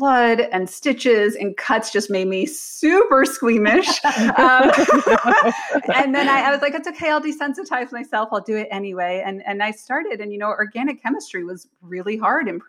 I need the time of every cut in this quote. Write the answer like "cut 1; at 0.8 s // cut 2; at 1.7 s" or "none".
none